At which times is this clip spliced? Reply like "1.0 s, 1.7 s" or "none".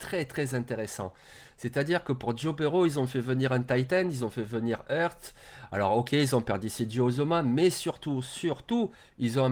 none